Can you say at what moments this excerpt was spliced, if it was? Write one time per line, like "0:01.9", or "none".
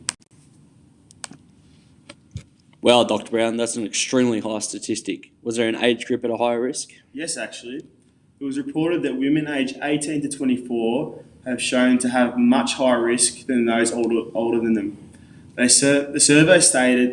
none